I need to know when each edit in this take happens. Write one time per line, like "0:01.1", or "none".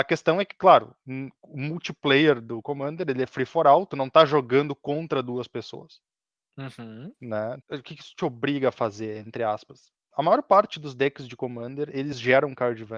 0:07.6